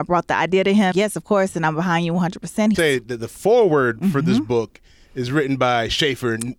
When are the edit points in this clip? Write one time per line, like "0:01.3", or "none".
0:00.9
0:02.7